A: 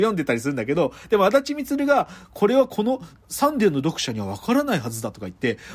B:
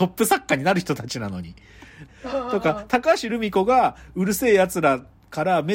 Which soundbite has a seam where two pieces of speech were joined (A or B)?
B